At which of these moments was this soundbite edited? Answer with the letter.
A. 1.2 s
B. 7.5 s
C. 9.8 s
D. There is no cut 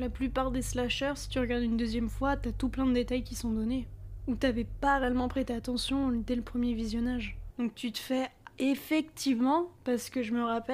B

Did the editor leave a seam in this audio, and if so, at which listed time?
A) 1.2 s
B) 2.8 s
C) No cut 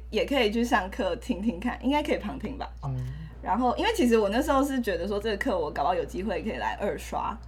B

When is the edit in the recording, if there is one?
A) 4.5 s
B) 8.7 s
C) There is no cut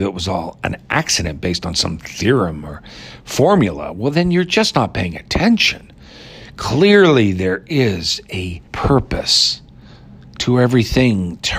B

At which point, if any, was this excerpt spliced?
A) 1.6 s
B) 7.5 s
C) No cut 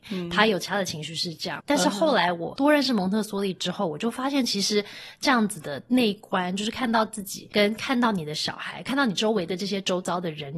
A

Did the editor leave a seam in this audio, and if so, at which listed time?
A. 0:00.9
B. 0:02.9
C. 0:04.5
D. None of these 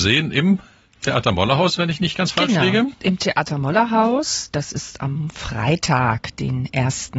D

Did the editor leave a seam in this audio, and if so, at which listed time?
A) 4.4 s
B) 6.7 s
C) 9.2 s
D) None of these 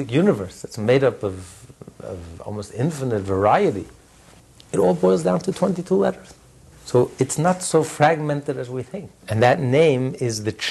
C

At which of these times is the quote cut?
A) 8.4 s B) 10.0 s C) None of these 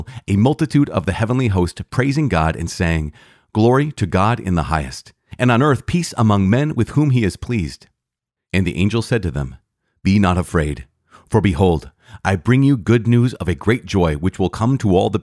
A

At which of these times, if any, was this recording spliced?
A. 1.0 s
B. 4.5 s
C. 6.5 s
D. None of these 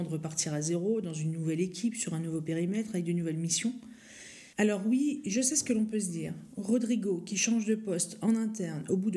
B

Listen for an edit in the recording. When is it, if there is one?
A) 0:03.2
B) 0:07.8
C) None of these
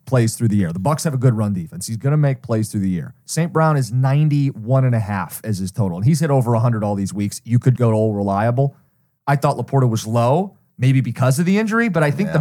B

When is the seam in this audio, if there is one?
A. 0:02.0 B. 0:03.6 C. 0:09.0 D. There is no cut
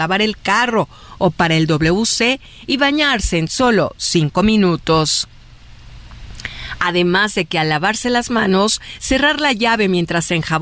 D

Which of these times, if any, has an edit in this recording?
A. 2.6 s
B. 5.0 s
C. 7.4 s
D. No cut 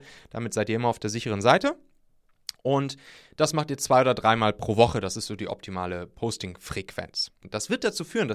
C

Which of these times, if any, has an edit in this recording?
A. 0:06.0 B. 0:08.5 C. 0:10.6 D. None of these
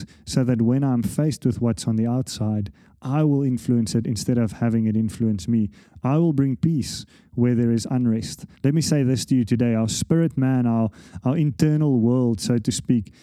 B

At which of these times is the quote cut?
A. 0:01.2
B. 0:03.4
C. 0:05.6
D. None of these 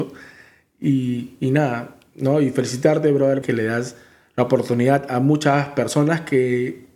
B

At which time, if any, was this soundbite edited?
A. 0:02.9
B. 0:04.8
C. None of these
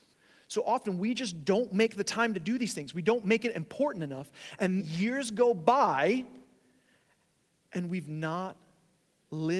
B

